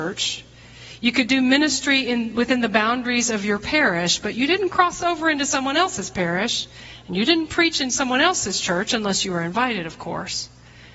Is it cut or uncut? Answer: uncut